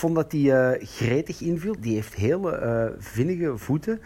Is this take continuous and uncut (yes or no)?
no